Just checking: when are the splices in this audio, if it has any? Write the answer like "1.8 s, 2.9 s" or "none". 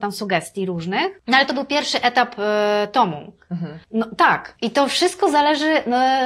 3.8 s